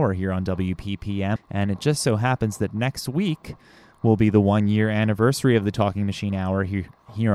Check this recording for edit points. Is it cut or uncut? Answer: cut